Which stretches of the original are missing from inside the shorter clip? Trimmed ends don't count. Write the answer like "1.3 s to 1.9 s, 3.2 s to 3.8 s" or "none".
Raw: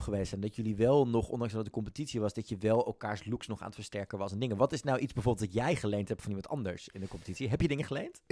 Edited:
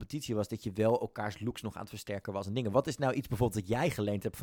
none